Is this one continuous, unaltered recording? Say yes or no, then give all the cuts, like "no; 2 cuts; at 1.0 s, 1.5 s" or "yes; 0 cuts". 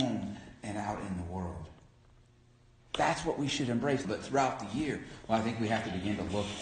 no; 3 cuts; at 2.8 s, 4.0 s, 5.2 s